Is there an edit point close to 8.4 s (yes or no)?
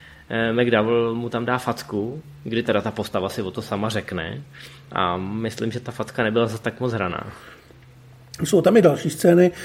no